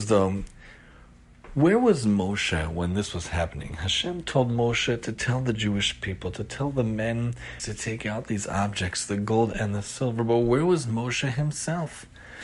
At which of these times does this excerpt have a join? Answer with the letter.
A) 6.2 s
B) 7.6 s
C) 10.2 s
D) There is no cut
B